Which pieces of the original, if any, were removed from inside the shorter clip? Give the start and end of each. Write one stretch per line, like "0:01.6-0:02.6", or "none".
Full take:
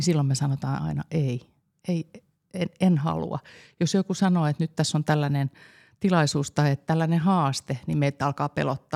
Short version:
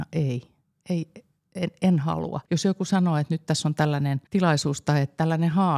0:03.4-0:03.7
0:05.5-0:05.9